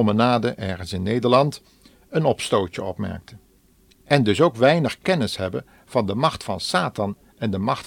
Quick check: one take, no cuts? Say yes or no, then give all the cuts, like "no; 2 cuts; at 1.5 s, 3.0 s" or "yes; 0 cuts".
no; 1 cut; at 3.9 s